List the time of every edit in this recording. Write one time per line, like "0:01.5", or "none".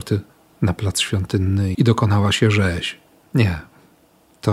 0:01.7
0:03.2